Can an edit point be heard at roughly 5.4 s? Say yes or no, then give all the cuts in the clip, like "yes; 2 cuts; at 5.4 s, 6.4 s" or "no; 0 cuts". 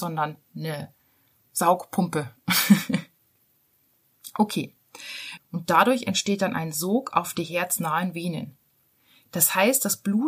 yes; 1 cut; at 5.4 s